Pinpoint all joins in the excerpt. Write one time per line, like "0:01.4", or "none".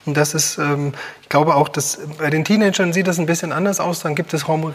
none